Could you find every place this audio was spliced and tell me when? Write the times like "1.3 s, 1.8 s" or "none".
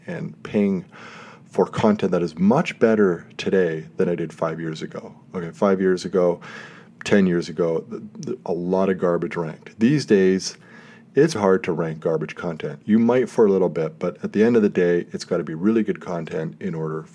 11.3 s